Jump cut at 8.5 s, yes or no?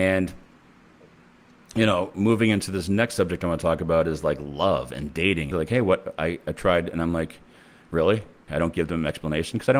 yes